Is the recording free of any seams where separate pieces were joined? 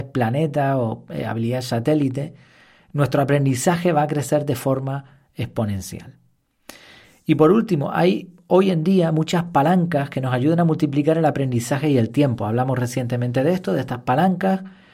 yes; 0 cuts

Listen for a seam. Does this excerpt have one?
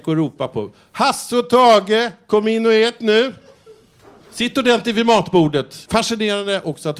yes; 1 cut; at 5.8 s

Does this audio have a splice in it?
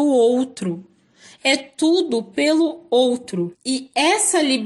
yes; 1 cut; at 1.4 s

